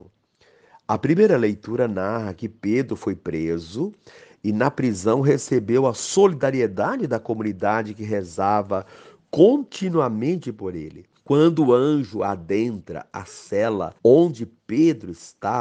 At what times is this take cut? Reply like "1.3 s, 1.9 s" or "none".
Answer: 11.2 s, 14.0 s